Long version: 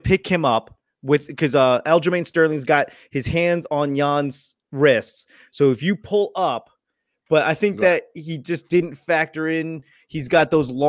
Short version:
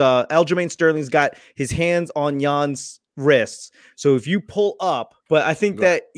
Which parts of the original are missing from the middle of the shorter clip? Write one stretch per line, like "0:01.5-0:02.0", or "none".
0:06.8-0:07.2